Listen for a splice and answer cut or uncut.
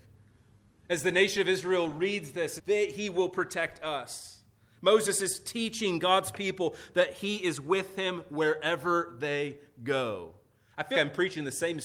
cut